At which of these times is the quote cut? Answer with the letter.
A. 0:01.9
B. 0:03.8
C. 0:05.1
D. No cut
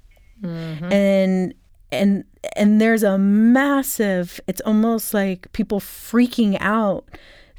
D